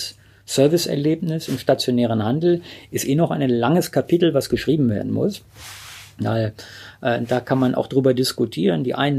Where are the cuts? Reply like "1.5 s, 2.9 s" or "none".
none